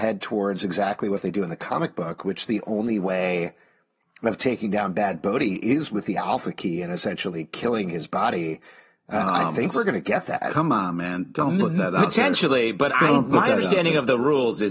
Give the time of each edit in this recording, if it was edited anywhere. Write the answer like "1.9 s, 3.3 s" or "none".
12.9 s